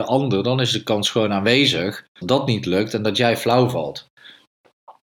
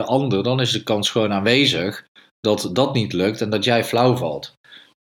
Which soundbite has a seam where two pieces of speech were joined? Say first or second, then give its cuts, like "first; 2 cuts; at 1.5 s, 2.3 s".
first; 1 cut; at 2.2 s